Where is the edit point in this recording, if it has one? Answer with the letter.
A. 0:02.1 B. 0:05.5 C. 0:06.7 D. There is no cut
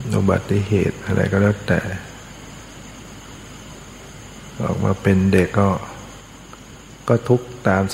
B